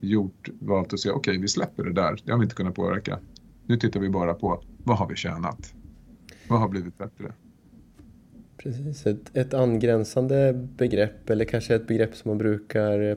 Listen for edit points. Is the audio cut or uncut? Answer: uncut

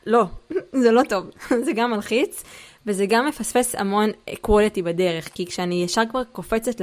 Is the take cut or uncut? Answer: uncut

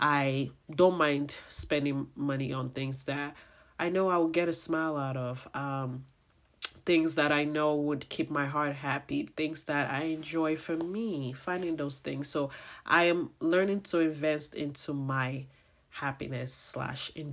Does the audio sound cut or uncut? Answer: uncut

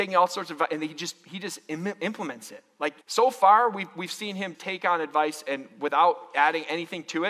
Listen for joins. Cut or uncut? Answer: cut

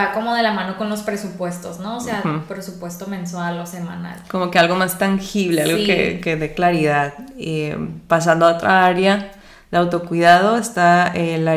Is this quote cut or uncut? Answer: uncut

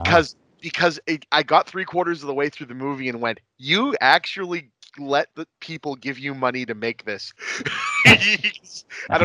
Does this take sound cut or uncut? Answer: cut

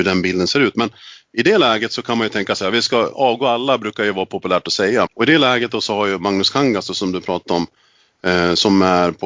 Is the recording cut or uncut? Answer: cut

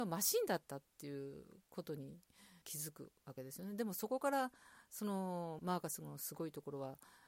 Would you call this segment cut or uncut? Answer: cut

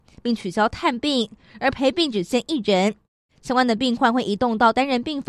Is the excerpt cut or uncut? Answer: uncut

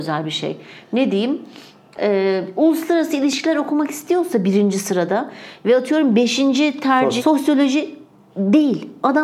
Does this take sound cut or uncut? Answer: cut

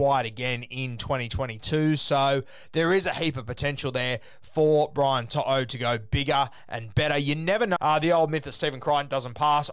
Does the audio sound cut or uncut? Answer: cut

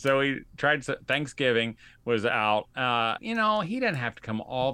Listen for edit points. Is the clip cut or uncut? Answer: cut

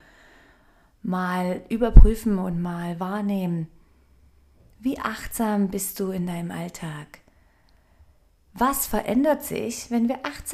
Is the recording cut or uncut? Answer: uncut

